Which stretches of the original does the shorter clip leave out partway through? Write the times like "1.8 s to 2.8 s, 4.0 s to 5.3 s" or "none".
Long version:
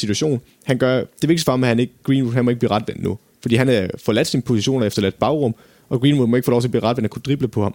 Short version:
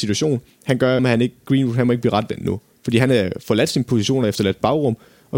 1.0 s to 1.6 s